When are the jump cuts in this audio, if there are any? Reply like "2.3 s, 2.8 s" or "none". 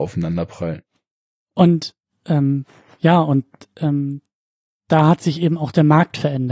none